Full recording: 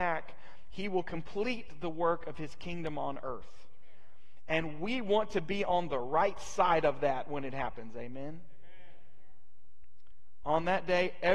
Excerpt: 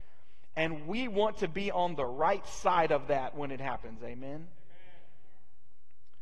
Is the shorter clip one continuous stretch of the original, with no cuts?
yes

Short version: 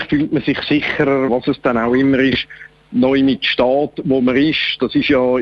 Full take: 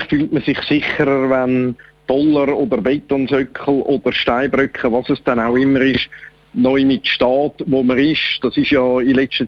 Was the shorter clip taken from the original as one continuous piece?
no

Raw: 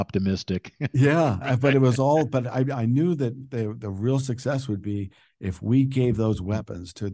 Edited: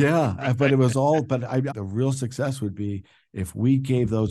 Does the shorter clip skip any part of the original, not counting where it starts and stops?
yes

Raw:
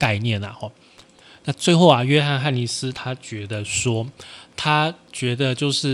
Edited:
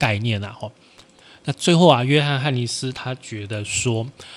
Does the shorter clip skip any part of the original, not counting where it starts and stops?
no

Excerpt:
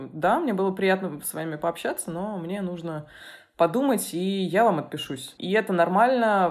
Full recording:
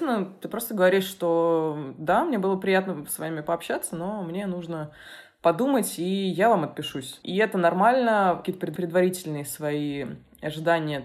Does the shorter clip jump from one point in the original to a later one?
no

